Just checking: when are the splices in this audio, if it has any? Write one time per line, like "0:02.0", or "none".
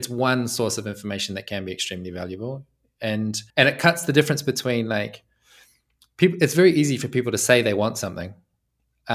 0:03.5